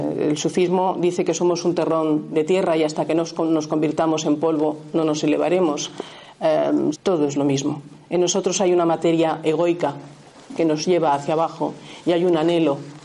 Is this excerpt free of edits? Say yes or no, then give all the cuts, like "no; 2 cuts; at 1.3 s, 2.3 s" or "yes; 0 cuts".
no; 1 cut; at 6.9 s